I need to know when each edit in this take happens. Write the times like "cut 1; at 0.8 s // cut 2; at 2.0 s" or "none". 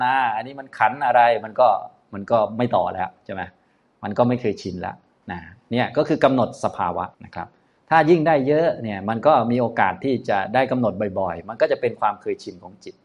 cut 1; at 7.1 s